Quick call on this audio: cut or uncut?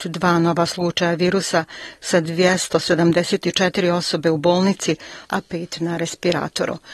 cut